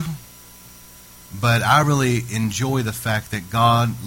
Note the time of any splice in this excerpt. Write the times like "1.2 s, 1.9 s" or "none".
none